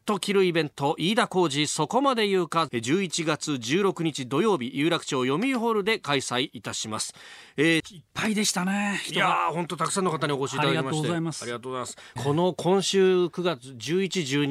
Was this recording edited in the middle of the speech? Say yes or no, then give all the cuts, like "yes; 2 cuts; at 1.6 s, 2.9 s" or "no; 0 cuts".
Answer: yes; 3 cuts; at 2.7 s, 7.8 s, 12.2 s